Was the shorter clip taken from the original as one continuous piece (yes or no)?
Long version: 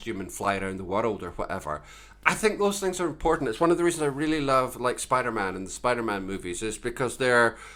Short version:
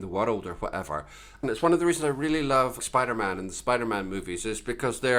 no